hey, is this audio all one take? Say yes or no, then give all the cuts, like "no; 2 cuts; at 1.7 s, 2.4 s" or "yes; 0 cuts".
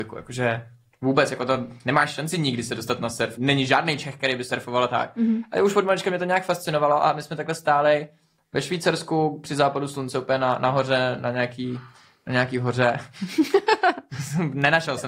no; 1 cut; at 3.4 s